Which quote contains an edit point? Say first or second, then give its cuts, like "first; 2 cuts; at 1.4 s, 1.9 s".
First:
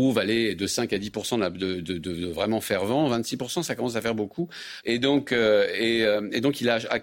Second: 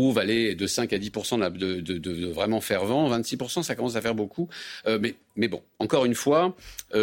first; 1 cut; at 4.8 s